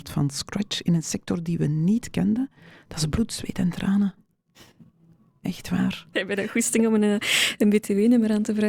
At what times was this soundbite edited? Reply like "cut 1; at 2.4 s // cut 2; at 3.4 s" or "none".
cut 1; at 6.1 s